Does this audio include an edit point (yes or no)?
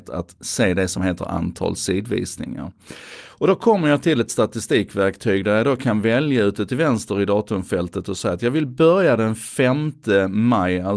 no